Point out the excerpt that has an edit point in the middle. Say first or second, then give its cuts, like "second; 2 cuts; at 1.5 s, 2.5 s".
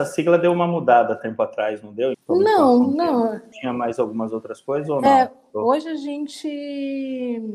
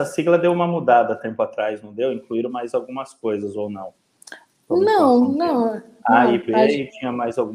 first; 2 cuts; at 2.1 s, 3.5 s